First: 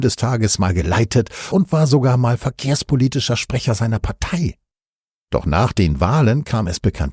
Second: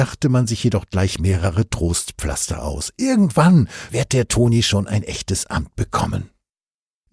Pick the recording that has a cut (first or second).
second